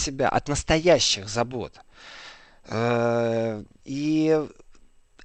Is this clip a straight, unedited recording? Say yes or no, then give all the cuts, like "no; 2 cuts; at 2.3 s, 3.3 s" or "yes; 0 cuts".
yes; 0 cuts